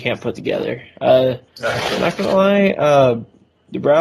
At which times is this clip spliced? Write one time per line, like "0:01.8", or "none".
0:01.5